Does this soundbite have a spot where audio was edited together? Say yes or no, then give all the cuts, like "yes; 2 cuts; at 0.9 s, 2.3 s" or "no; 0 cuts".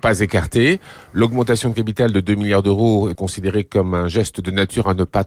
yes; 1 cut; at 3.2 s